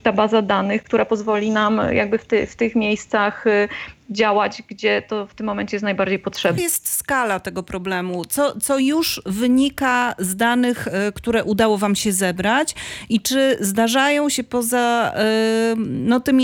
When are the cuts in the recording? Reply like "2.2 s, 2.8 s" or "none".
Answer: 6.6 s